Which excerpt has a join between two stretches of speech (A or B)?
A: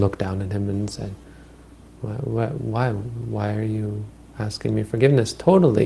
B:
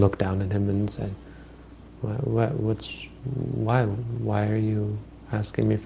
A